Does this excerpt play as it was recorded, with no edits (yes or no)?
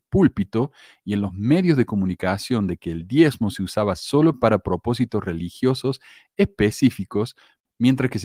yes